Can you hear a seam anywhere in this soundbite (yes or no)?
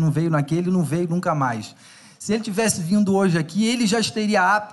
no